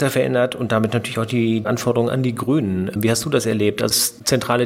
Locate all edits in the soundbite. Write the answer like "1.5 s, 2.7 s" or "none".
none